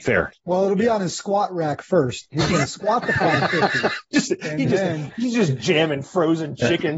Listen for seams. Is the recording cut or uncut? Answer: uncut